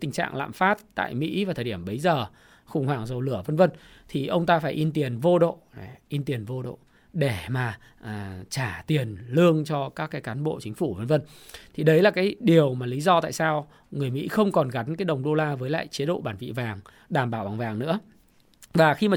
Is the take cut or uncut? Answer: uncut